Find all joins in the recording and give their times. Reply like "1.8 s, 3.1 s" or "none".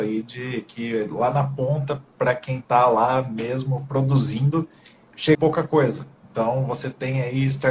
5.3 s